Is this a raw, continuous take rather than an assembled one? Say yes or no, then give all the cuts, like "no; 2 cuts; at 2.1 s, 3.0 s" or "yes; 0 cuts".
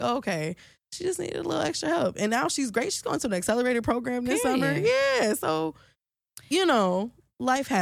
yes; 0 cuts